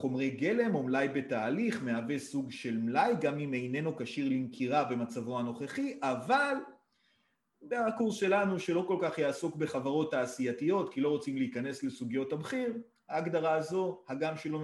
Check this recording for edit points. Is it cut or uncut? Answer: uncut